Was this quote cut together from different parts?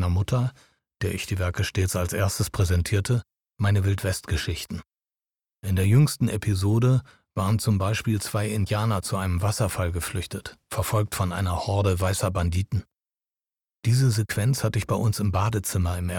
no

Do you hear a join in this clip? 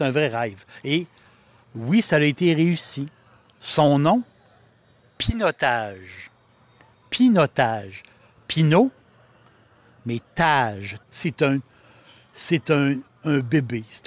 yes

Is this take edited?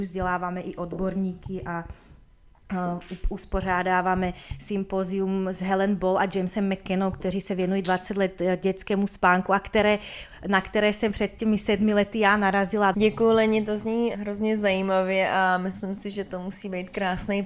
yes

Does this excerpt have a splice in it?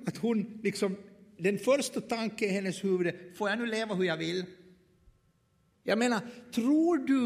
yes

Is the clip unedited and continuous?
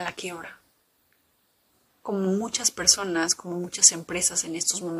no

